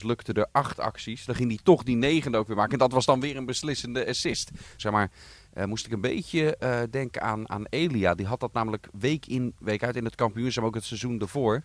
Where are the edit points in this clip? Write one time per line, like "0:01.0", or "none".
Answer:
0:04.8